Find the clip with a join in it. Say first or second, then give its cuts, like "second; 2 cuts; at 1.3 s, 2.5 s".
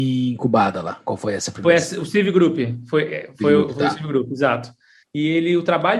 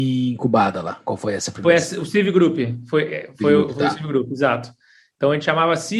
first; 1 cut; at 5.0 s